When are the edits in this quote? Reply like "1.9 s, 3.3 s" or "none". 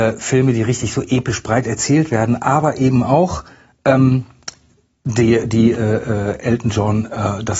none